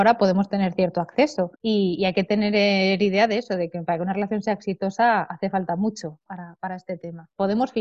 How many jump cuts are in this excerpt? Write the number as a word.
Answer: two